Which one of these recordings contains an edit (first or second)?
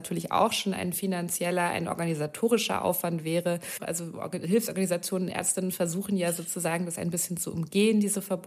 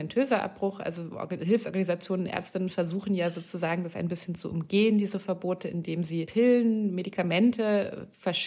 first